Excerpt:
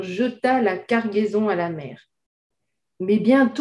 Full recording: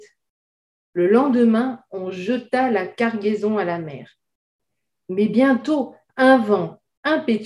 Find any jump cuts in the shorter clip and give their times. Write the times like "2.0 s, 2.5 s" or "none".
none